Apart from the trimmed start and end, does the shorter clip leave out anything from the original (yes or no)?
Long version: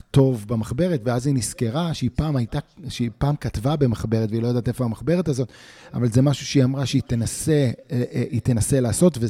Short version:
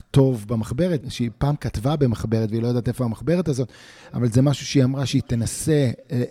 yes